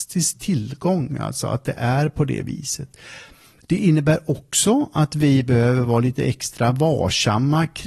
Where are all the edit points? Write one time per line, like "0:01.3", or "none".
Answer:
none